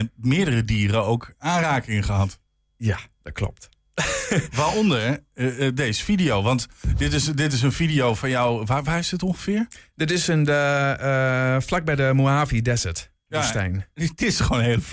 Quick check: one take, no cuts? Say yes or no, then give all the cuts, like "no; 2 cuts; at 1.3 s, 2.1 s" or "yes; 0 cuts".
yes; 0 cuts